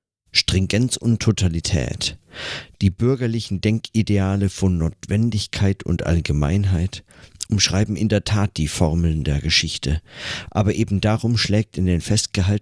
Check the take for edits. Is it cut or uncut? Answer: uncut